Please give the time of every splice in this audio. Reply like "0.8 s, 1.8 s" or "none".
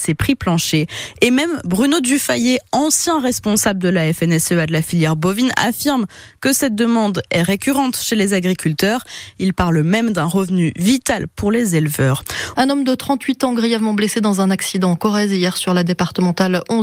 12.5 s